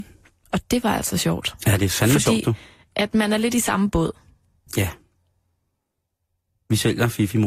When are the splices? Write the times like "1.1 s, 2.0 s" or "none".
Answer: 4.7 s